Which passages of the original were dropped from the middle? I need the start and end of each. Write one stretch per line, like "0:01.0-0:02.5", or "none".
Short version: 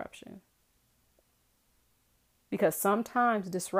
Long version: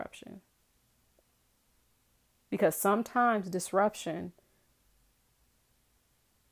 none